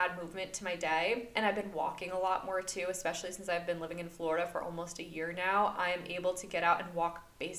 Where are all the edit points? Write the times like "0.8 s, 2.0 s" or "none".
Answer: none

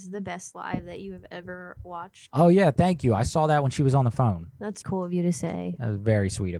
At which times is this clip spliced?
4.8 s

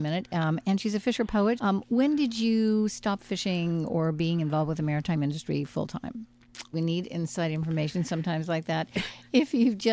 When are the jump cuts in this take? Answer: 1.6 s, 6.7 s

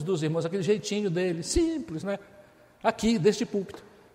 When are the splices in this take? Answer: none

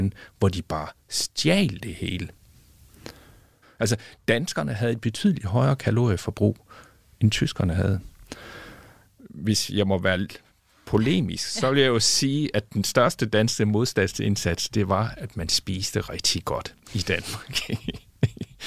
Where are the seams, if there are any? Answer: 3.6 s

